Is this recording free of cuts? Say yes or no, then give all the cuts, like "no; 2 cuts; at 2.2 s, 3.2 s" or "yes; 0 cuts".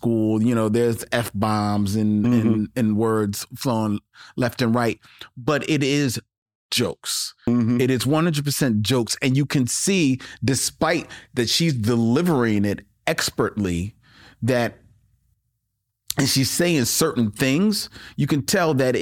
yes; 0 cuts